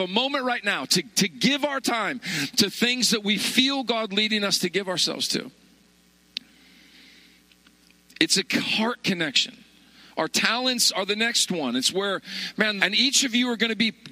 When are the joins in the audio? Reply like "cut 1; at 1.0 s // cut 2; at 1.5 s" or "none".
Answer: cut 1; at 12.8 s